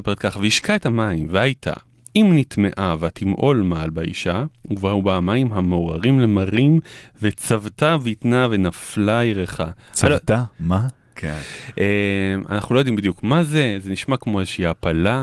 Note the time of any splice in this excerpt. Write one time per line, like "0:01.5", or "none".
0:04.6
0:11.1